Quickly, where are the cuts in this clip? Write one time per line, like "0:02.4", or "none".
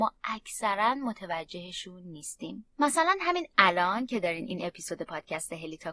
0:02.7